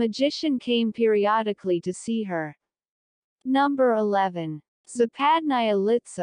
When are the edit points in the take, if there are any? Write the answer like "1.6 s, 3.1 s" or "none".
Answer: none